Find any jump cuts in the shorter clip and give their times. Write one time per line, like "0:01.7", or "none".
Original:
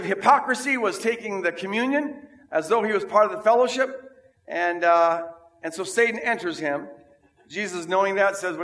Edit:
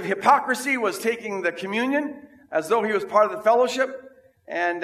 none